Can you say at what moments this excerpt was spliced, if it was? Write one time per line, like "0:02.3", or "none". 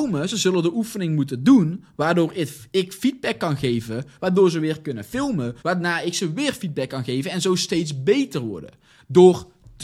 0:04.2
0:05.6